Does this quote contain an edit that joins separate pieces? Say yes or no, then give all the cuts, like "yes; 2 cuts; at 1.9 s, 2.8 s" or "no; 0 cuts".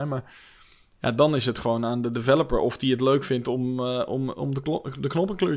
no; 0 cuts